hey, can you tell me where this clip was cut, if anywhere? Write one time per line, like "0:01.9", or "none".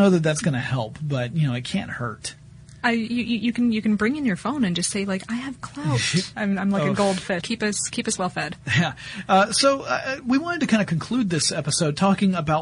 0:06.3
0:07.4